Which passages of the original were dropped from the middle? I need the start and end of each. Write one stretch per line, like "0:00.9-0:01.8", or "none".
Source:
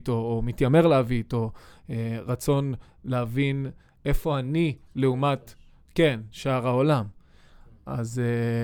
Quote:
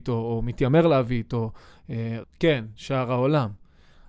0:02.2-0:05.8

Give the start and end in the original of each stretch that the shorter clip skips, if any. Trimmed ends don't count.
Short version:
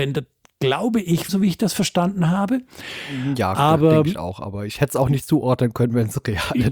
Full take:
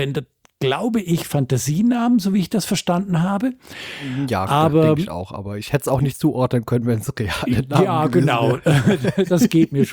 0:01.3-0:02.2

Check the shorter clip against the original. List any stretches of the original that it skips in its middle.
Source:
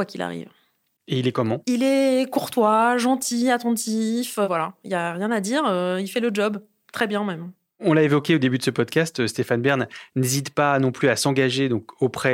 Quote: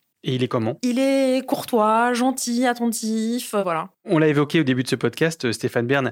0:04.8-0:07.7

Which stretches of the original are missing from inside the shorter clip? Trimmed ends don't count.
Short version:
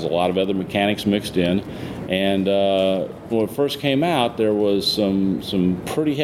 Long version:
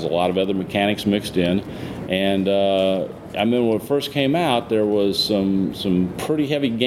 0:03.3-0:03.6

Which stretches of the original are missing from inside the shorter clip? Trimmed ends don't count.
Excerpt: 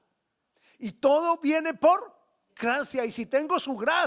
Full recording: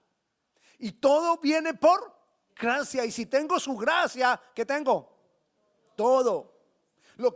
none

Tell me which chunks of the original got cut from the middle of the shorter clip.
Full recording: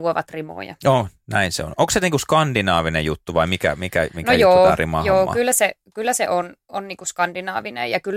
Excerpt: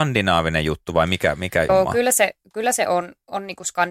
0:04.1-0:05.1

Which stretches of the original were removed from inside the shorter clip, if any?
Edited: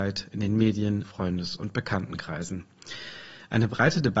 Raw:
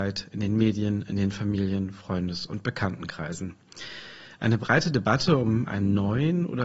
0:01.0-0:01.9

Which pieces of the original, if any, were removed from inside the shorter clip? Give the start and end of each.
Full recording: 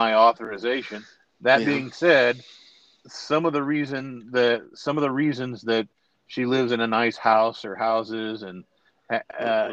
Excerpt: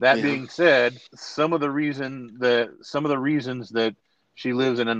0:02.5-0:03.0

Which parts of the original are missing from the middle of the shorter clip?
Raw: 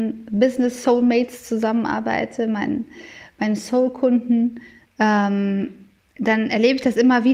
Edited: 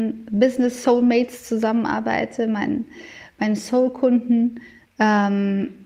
none

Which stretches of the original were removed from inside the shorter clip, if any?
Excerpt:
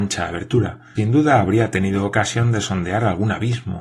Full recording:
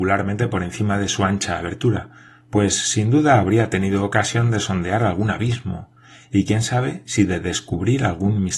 0:02.3-0:02.9

